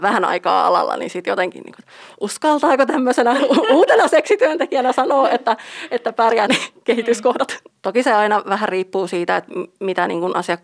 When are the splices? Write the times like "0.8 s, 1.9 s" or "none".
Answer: 6.5 s, 7.7 s

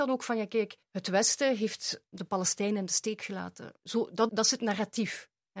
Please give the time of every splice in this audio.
4.3 s

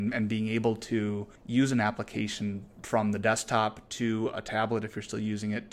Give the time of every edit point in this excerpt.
1.4 s

